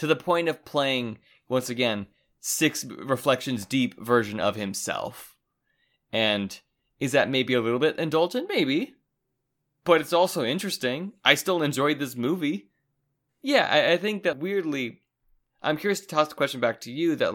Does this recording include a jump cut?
yes; 2 cuts; at 13.3 s, 14.3 s

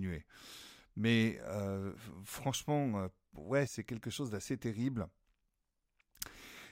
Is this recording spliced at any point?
yes; 1 cut; at 3.7 s

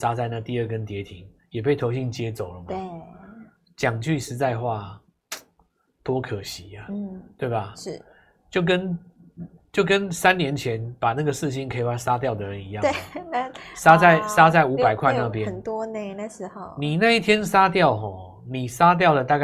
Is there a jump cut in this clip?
no; 0 cuts

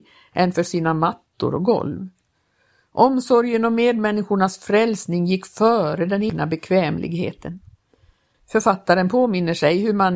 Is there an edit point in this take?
yes; 1 cut; at 8.3 s

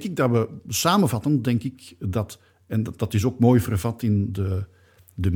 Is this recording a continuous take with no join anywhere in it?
yes; 0 cuts

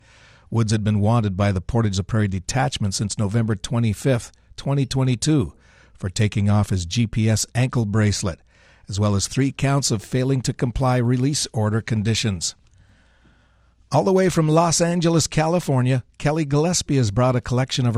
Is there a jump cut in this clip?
no; 0 cuts

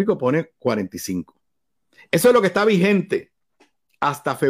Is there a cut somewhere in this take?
no; 0 cuts

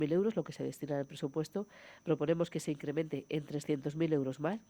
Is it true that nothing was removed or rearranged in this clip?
yes; 0 cuts

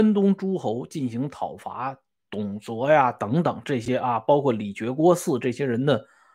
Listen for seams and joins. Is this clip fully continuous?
yes; 0 cuts

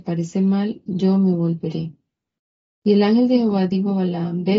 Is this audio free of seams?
yes; 0 cuts

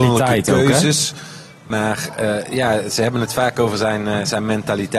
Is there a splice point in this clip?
no; 0 cuts

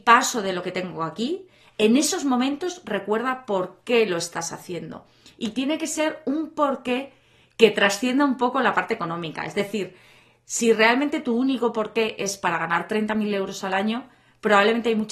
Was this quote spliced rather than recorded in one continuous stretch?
no; 0 cuts

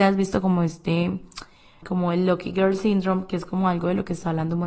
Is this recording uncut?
no; 1 cut; at 1.8 s

